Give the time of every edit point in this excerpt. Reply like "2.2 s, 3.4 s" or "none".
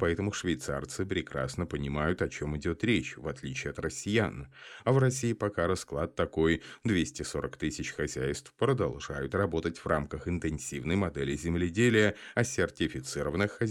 none